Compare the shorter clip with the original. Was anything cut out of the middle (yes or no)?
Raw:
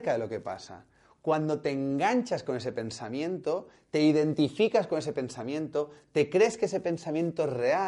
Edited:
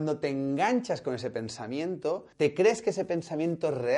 yes